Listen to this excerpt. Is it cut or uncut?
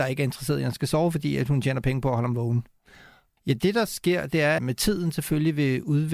cut